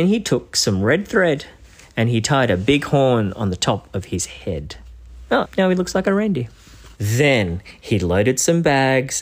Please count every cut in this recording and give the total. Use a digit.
1